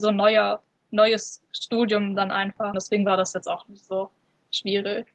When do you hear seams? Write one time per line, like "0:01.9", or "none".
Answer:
0:02.7